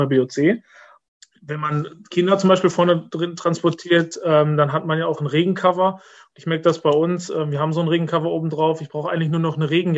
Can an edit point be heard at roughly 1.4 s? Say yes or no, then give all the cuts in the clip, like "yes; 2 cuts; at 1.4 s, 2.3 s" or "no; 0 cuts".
no; 0 cuts